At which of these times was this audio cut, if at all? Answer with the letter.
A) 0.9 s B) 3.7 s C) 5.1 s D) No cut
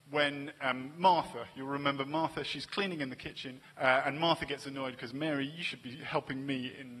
B